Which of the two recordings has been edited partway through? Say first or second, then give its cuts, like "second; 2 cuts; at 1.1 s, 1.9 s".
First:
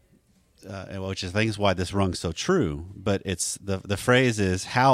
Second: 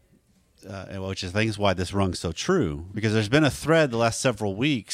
second; 1 cut; at 2.9 s